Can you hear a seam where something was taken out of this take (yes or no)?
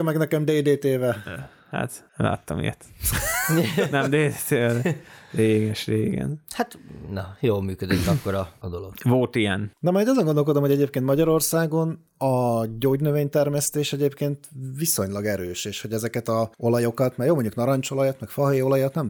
yes